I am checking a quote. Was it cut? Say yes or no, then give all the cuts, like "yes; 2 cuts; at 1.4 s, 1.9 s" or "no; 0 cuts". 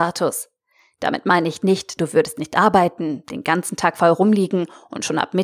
yes; 1 cut; at 2.0 s